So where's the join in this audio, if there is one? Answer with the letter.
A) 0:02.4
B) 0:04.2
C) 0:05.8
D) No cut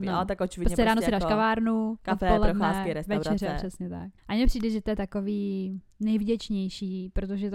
B